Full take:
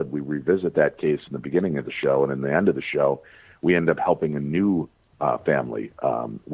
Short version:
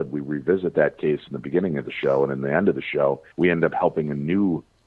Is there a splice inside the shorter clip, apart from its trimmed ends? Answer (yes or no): yes